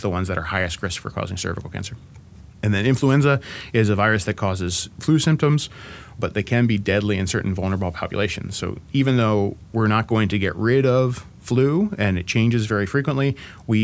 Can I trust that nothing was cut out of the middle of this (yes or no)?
no